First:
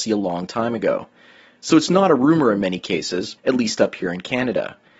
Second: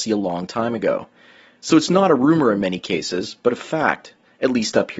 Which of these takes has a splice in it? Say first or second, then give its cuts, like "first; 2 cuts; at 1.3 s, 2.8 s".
first; 1 cut; at 3.4 s